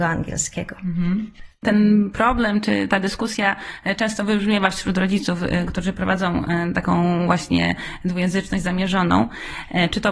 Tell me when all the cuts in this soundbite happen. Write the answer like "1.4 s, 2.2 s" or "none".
none